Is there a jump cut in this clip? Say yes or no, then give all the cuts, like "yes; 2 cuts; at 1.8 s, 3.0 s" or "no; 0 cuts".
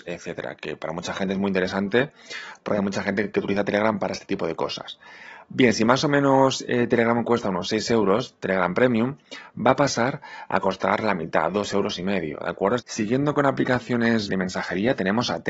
yes; 2 cuts; at 12.8 s, 14.3 s